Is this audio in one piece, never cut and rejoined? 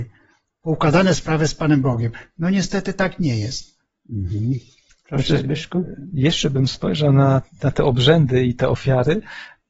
yes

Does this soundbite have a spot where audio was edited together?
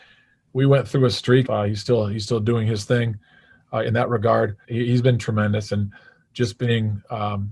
yes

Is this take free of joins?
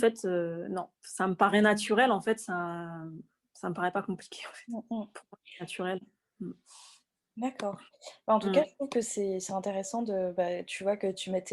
yes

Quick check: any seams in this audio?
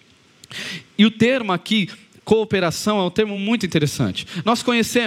no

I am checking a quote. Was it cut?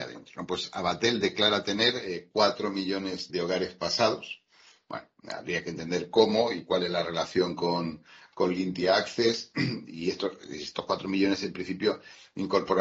yes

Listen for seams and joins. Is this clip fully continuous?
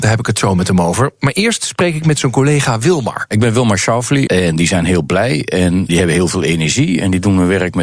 no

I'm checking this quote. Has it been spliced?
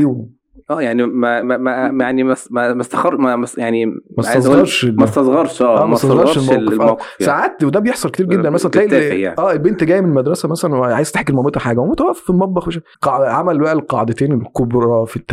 yes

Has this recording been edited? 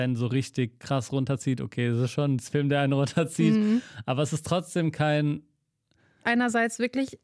yes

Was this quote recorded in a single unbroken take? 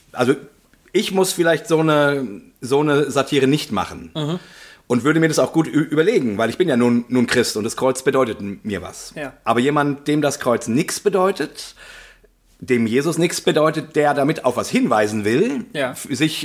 yes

